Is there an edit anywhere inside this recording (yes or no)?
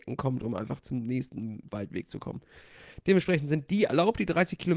no